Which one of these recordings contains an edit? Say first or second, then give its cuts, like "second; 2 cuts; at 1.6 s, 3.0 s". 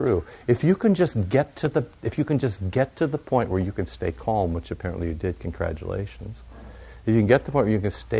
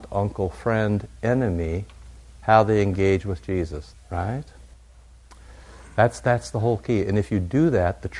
second; 1 cut; at 3.9 s